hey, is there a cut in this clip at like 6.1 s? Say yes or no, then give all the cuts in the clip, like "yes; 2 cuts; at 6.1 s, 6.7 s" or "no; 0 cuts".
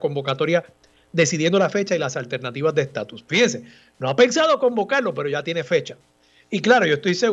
no; 1 cut; at 3.3 s